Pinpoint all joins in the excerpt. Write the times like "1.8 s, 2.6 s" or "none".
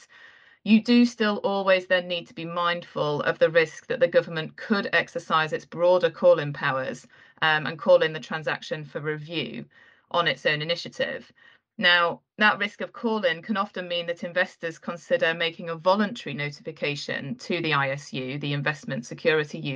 none